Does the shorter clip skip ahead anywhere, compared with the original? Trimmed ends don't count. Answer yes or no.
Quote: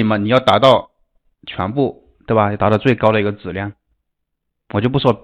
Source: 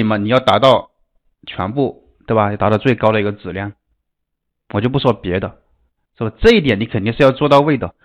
no